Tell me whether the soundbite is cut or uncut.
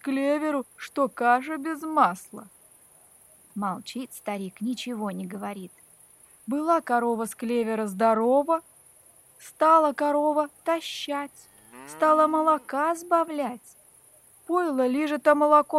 uncut